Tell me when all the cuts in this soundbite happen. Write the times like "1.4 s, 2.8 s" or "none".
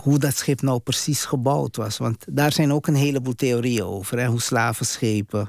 none

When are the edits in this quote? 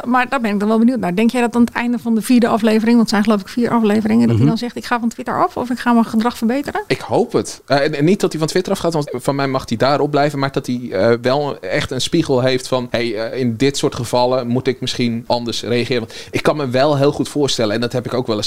9.1 s

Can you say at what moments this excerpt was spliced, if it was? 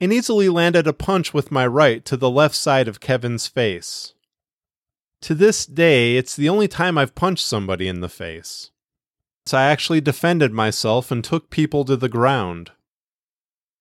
9.5 s

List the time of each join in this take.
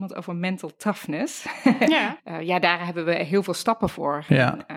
2.2 s

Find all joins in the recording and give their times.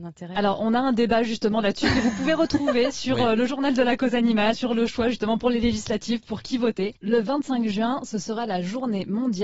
4.5 s, 7.0 s

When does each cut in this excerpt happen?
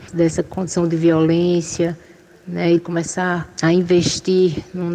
2.8 s

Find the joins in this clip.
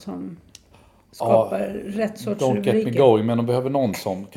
none

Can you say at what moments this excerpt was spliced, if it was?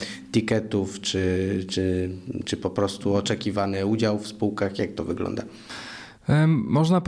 none

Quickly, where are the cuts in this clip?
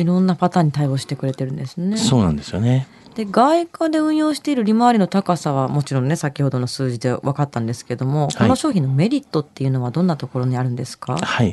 none

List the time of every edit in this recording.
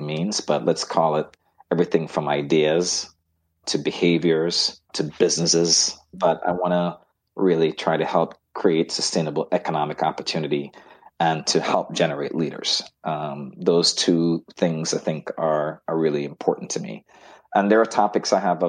4.8 s

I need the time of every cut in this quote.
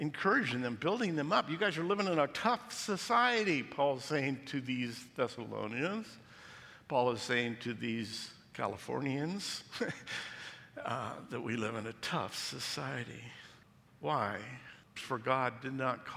15.0 s

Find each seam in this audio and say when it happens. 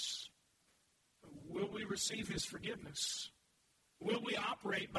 none

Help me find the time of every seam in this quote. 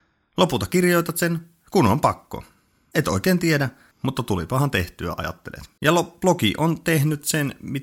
3.9 s, 5.8 s

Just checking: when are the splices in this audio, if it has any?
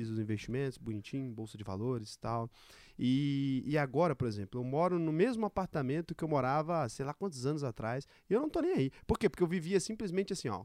none

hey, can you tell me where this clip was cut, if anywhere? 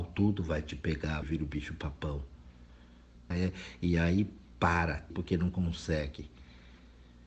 1.2 s, 3.3 s, 5.1 s

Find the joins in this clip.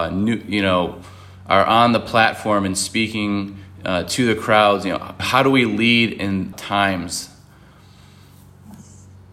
5.2 s, 6.5 s

